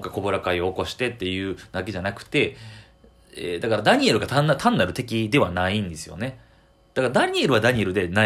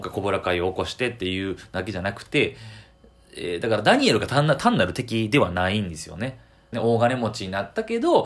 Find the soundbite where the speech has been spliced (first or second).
second